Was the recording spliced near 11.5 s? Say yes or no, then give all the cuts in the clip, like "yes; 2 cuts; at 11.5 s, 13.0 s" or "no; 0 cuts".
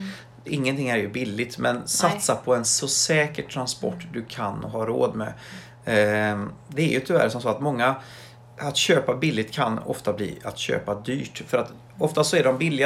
no; 0 cuts